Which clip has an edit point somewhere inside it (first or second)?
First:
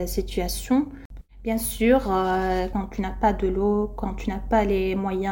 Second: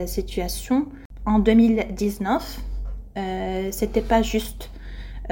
first